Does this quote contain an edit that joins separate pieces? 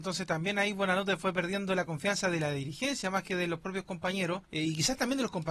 yes; 1 cut; at 4.4 s

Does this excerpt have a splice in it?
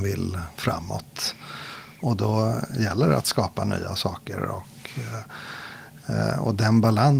no; 0 cuts

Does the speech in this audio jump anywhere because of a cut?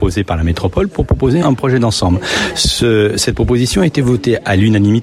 yes; 1 cut; at 1.4 s

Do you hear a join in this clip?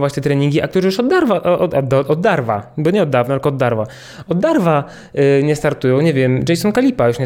no; 0 cuts

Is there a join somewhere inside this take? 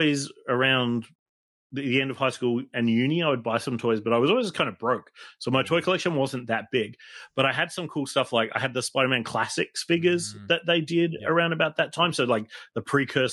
no; 0 cuts

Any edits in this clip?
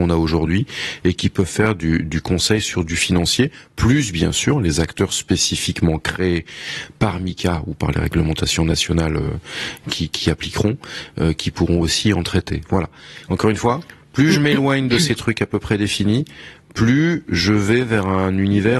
no; 0 cuts

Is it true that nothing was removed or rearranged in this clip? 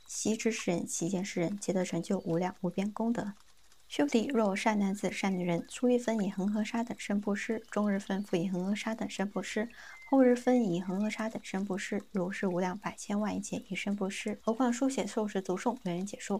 no; 1 cut; at 14.4 s

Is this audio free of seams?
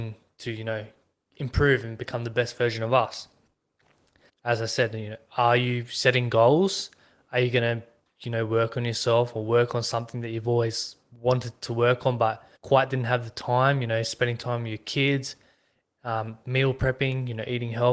no; 2 cuts; at 4.3 s, 12.6 s

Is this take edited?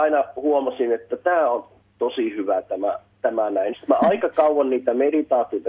yes; 1 cut; at 3.7 s

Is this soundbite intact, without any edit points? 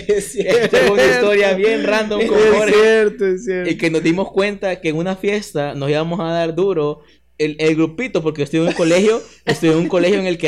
yes; 0 cuts

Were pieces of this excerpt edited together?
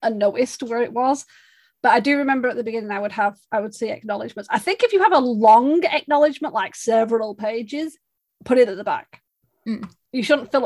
no; 0 cuts

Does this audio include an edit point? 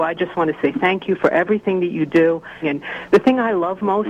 yes; 1 cut; at 2.6 s

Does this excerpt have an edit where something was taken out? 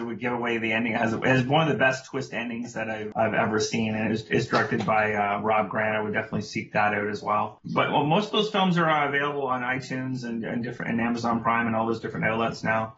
no; 0 cuts

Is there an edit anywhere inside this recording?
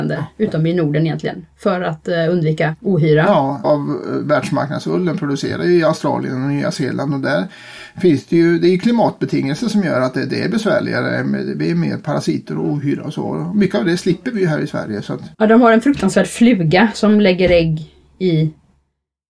yes; 2 cuts; at 3.6 s, 15.3 s

